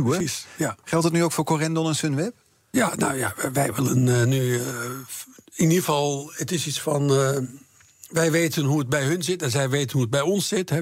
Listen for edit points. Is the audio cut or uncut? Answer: uncut